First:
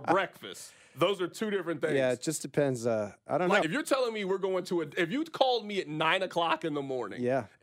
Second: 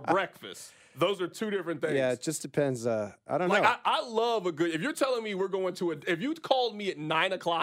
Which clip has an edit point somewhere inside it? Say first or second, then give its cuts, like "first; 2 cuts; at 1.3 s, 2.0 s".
first; 1 cut; at 3.6 s